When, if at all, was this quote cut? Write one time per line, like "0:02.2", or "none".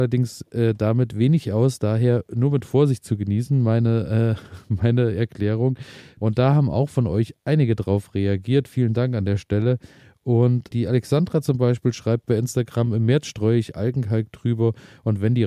0:06.2
0:10.7